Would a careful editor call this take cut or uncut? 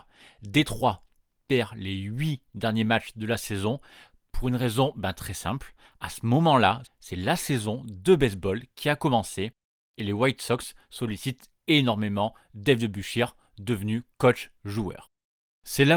cut